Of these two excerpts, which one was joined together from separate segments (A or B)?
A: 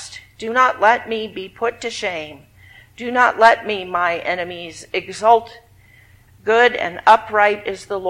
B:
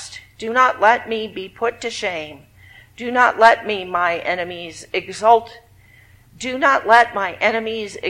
A